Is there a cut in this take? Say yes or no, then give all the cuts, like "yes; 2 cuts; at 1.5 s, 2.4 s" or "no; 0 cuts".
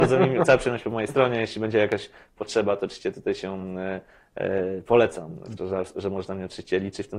yes; 1 cut; at 5.6 s